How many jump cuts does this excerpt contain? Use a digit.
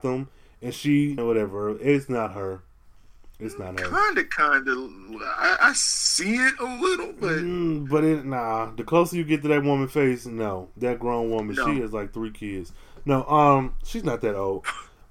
1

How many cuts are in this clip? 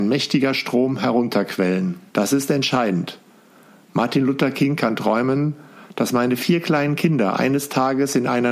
1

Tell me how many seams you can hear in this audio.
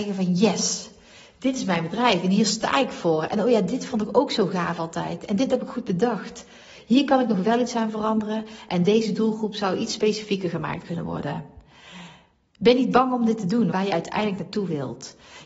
1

